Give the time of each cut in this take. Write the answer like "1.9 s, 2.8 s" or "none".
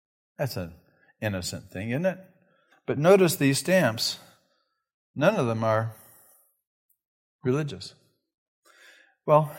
2.7 s